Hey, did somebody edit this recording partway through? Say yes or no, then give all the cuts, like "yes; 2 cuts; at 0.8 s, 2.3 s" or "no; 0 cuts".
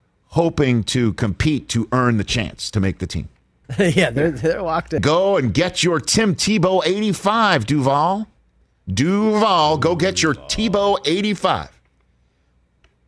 yes; 2 cuts; at 3.6 s, 5.0 s